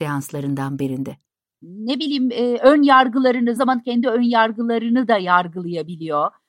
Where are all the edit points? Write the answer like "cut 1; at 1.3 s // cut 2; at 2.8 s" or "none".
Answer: cut 1; at 1.6 s // cut 2; at 3.6 s